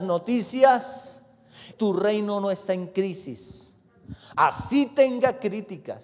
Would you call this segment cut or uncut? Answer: cut